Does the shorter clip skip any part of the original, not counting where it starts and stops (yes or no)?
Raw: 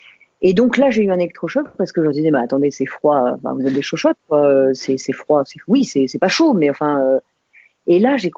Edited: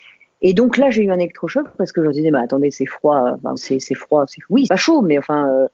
yes